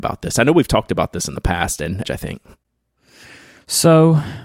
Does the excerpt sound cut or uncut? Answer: cut